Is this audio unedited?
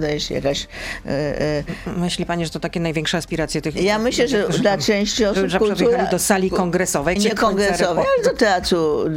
no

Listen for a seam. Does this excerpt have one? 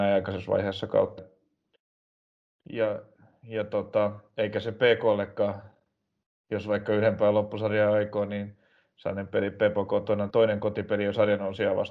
yes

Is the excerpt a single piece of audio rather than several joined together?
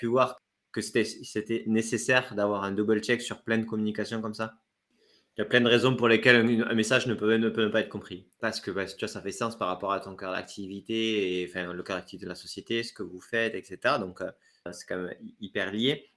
yes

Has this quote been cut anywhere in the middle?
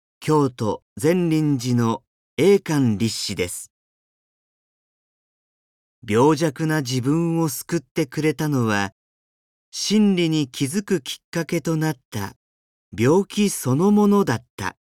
no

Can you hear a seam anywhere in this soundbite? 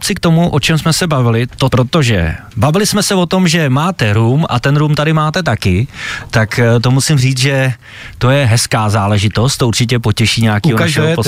yes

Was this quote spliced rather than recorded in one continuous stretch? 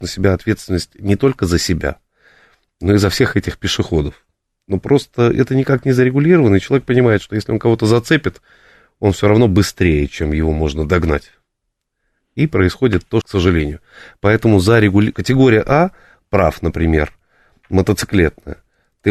yes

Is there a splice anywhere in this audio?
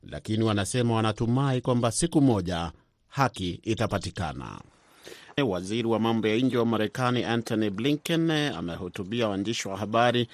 yes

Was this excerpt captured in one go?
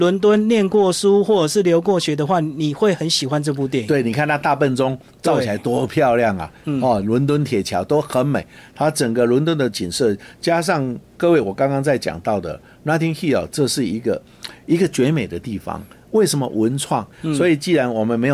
no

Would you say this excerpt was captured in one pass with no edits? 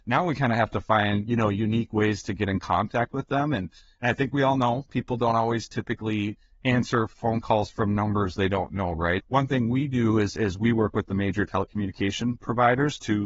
no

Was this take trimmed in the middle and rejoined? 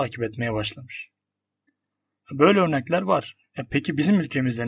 no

